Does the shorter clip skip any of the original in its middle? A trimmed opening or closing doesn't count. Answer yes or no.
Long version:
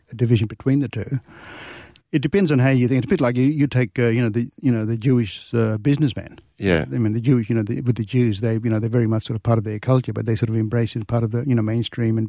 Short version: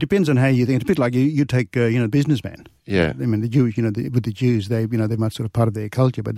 yes